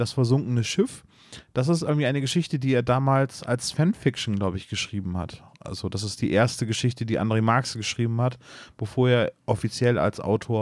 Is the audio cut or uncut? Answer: uncut